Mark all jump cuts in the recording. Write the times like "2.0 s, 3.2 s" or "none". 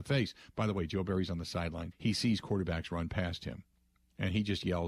1.9 s